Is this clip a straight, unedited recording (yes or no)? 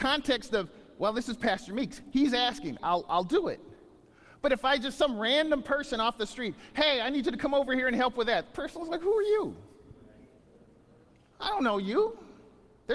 no